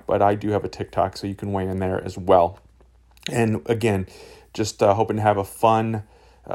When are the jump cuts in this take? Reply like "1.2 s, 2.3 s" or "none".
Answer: none